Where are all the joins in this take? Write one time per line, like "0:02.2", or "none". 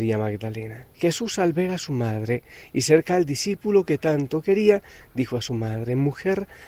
0:00.9